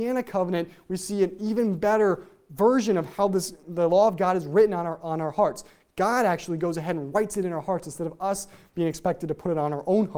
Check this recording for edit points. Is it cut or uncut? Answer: cut